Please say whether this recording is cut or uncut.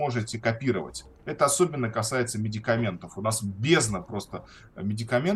uncut